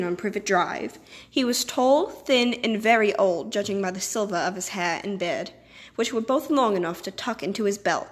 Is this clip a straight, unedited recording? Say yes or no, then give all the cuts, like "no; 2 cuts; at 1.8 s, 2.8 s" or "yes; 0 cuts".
yes; 0 cuts